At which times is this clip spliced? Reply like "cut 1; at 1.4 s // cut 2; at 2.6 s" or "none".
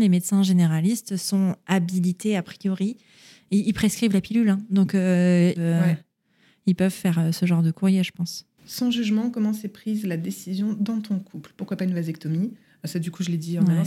cut 1; at 5.5 s